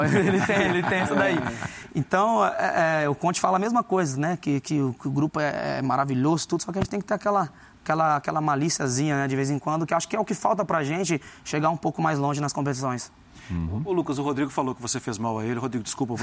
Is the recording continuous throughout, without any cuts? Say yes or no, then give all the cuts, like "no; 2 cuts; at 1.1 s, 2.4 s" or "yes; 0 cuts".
yes; 0 cuts